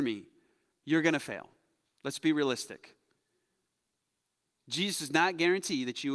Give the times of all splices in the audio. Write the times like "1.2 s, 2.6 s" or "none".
none